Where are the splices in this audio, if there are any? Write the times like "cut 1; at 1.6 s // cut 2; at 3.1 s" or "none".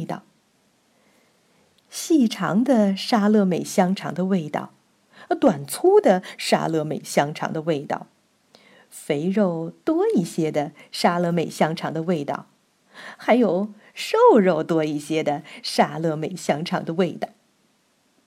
none